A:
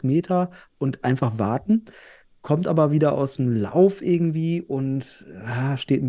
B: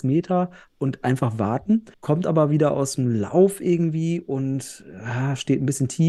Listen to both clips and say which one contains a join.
B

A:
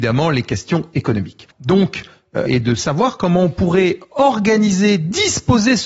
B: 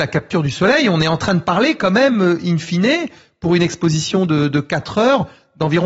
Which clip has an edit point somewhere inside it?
A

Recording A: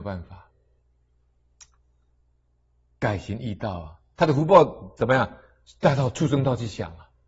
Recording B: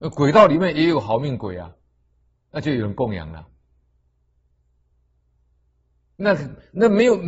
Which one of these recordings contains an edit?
A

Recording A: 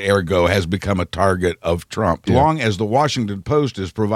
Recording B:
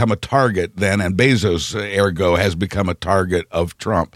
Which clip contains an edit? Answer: A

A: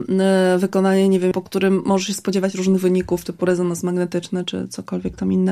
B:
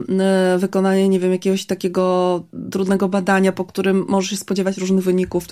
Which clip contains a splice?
A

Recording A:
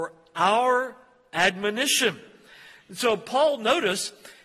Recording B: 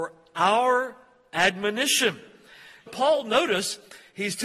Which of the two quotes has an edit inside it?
B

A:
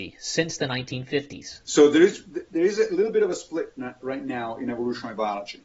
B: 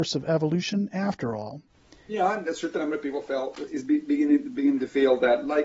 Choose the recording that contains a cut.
B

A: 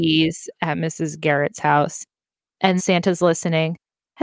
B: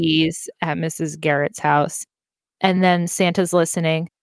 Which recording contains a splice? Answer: A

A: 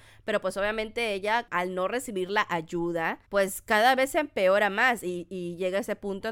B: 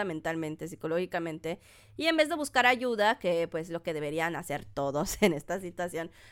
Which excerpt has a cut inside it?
A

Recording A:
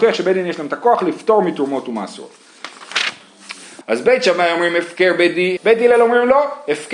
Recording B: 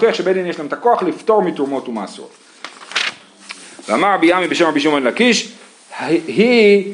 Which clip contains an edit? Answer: A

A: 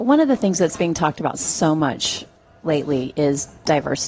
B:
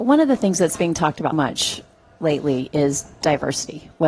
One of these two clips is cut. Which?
B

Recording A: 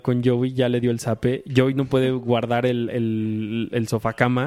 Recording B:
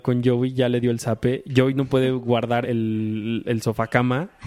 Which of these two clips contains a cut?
B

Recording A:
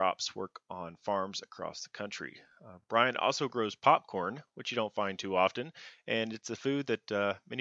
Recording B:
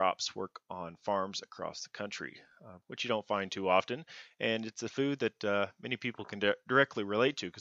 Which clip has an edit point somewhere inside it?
B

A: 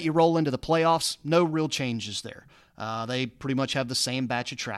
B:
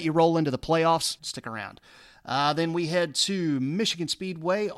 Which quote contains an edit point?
B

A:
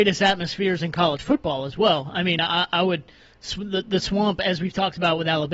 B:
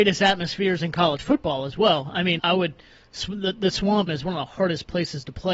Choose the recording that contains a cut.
B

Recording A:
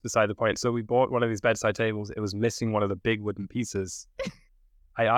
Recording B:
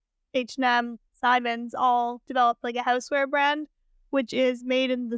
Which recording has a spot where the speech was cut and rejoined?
B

